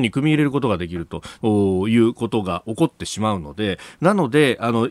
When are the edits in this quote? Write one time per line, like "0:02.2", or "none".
0:01.4
0:04.0